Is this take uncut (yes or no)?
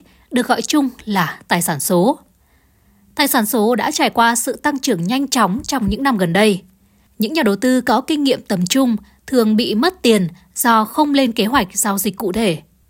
no